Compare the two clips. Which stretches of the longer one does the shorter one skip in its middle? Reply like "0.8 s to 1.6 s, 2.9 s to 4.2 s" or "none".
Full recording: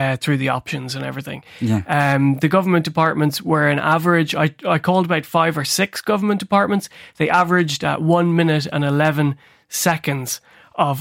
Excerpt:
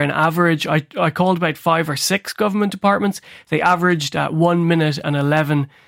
none